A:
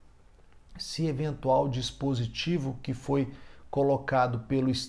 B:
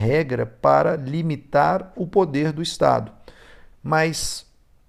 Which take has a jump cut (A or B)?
B